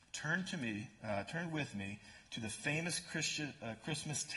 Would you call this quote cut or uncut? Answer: uncut